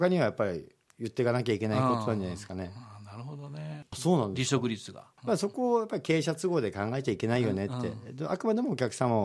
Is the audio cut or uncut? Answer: cut